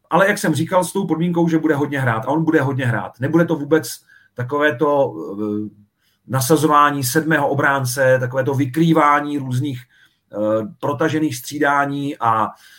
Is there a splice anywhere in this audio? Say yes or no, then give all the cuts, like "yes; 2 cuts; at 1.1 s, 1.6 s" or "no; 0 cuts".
no; 0 cuts